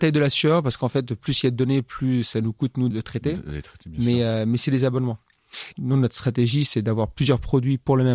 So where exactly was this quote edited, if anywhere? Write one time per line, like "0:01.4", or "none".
0:02.9
0:05.7